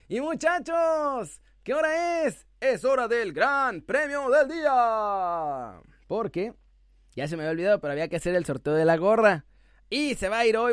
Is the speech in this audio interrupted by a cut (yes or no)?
no